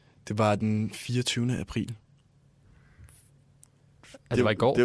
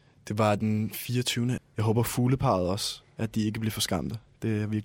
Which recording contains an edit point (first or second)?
second